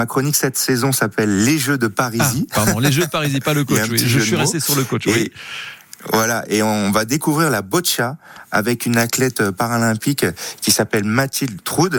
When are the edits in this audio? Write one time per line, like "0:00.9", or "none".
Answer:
none